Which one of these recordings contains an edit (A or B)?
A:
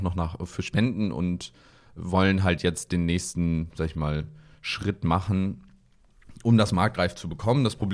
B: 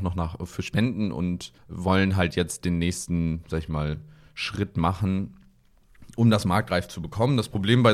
B